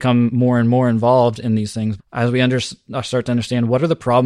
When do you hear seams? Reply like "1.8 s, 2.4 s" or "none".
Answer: 2.0 s